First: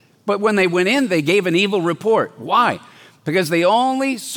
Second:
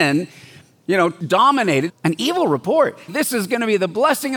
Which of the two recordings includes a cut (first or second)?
second